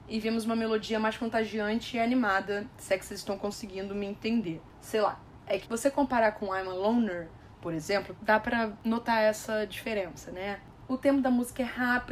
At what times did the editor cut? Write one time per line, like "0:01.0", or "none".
0:05.6
0:08.2